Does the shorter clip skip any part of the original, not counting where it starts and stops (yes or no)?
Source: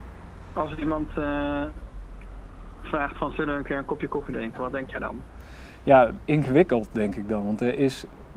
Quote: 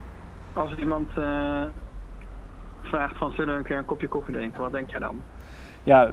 no